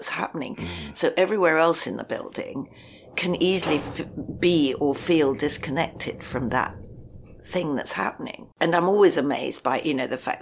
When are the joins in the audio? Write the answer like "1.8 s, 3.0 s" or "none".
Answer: 8.5 s